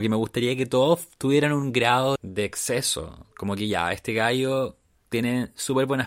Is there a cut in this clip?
yes; 2 cuts; at 2.2 s, 3.3 s

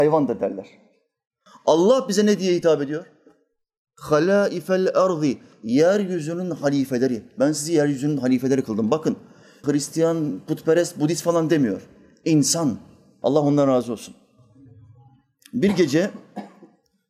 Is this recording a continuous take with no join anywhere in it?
no; 2 cuts; at 9.6 s, 13.2 s

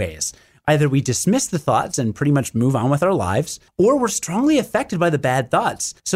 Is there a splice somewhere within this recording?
no; 0 cuts

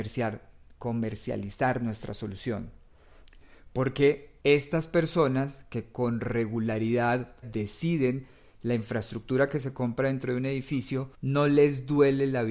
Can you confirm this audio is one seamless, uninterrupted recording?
no; 3 cuts; at 4.4 s, 7.4 s, 11.1 s

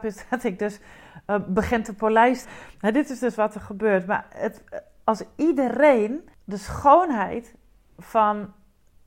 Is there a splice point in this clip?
yes; 1 cut; at 2.4 s

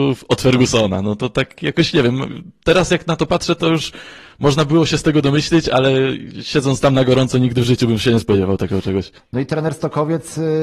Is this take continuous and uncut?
no; 1 cut; at 9.2 s

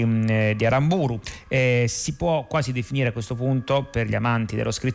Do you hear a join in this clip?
no; 0 cuts

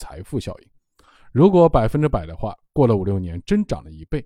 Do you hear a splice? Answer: no; 0 cuts

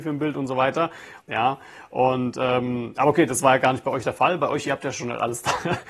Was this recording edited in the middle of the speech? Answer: yes; 1 cut; at 1.2 s

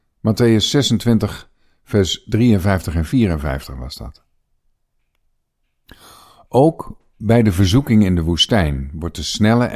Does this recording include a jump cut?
no; 0 cuts

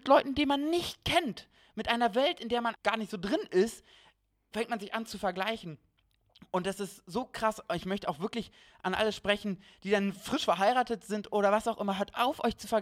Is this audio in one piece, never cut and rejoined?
no; 1 cut; at 2.7 s

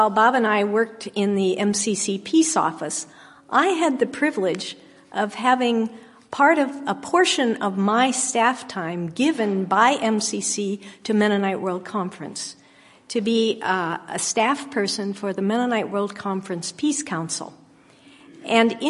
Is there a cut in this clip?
no; 0 cuts

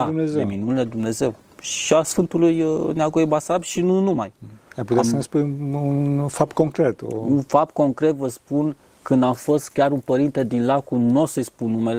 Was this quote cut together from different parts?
no; 0 cuts

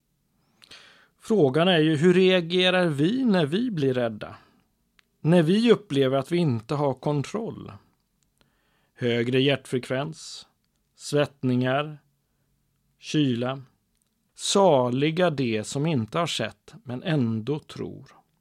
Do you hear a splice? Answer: yes; 1 cut; at 14.3 s

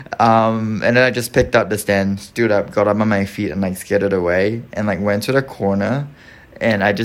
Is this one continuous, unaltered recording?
yes; 0 cuts

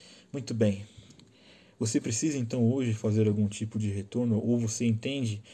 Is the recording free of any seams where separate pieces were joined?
yes; 0 cuts

